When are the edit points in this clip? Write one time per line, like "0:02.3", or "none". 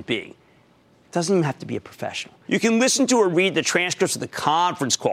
0:02.5